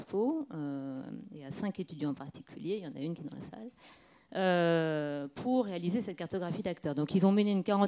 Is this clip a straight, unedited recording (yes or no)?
yes